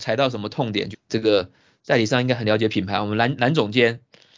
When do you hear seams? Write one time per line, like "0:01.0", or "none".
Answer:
0:00.9